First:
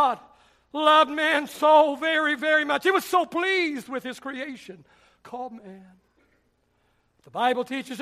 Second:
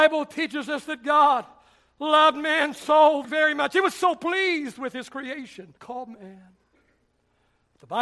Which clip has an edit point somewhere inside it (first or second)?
second